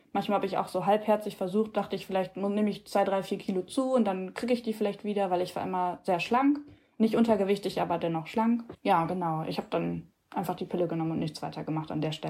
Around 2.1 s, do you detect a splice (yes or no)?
no